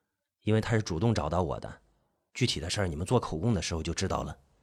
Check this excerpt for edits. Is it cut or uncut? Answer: cut